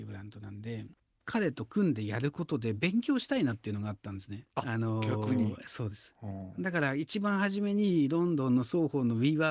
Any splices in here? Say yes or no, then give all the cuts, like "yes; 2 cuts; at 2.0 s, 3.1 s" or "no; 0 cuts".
yes; 1 cut; at 4.5 s